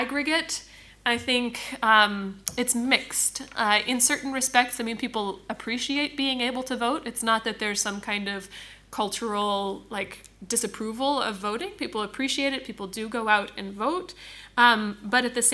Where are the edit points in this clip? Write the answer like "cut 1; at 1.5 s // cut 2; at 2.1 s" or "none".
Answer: none

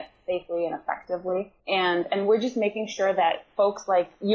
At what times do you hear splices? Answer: cut 1; at 1.6 s

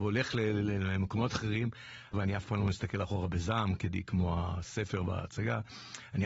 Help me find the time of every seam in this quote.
cut 1; at 2.1 s

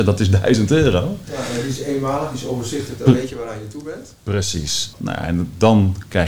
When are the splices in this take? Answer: cut 1; at 4.9 s

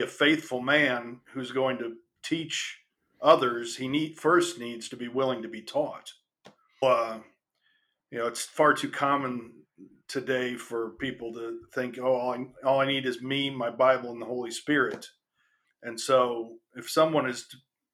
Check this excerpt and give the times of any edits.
cut 1; at 6.8 s // cut 2; at 15.6 s

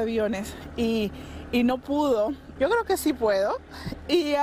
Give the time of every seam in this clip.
cut 1; at 2.6 s

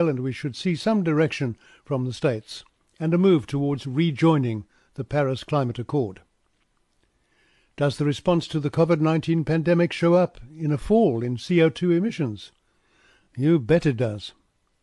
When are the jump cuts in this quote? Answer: none

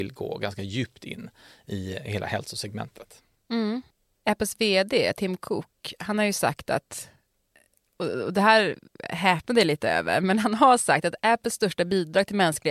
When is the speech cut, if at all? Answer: none

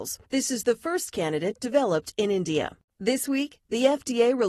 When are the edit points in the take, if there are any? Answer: cut 1; at 2.9 s

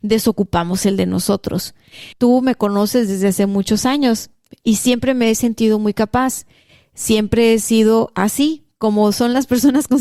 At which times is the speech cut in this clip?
cut 1; at 2.1 s

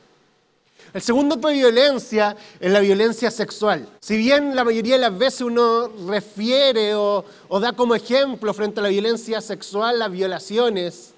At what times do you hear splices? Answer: cut 1; at 1.4 s // cut 2; at 4.0 s

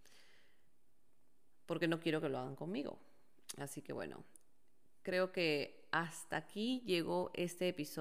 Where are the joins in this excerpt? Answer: none

